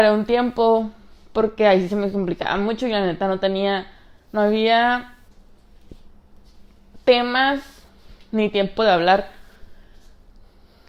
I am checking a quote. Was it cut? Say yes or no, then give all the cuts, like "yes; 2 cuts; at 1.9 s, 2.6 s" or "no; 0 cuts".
no; 0 cuts